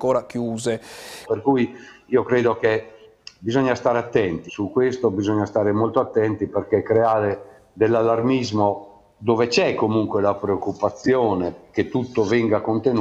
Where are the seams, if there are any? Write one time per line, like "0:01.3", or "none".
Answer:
0:01.3
0:04.5